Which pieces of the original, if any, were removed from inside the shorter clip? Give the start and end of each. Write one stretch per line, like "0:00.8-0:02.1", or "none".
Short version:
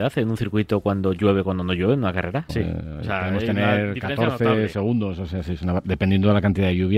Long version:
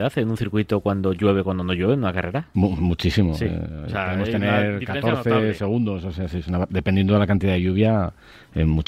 0:02.5-0:03.3